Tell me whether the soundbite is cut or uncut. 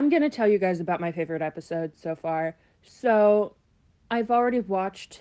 uncut